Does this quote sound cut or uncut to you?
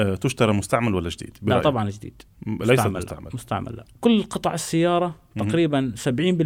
uncut